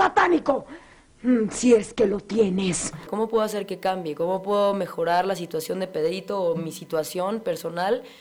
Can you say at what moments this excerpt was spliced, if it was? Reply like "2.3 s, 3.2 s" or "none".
3.1 s